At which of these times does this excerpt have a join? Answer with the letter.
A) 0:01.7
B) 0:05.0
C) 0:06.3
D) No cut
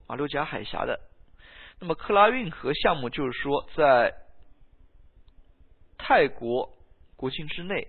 D